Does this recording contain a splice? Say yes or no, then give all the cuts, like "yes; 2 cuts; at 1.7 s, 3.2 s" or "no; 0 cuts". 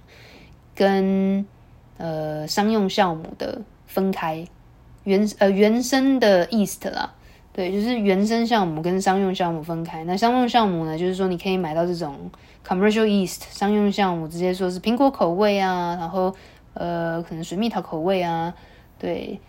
no; 0 cuts